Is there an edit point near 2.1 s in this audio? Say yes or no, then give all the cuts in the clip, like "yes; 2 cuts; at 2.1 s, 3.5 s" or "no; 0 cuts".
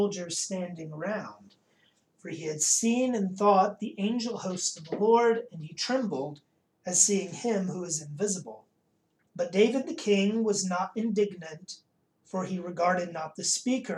no; 1 cut; at 9.3 s